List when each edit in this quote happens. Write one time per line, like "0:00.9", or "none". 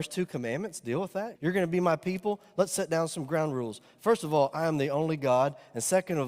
0:01.4

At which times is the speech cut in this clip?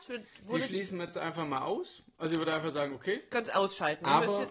none

